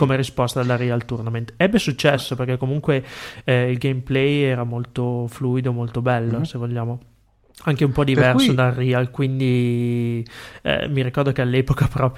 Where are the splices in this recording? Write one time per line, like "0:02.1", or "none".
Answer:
none